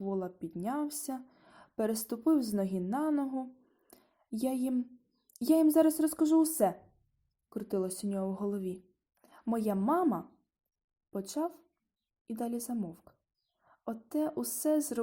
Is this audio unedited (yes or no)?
yes